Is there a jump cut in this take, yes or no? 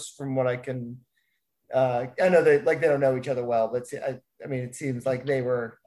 no